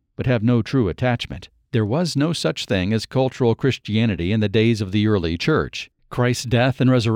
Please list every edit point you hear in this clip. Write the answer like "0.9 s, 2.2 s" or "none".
5.9 s